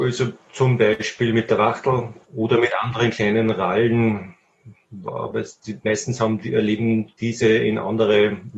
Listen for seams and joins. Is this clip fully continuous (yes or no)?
no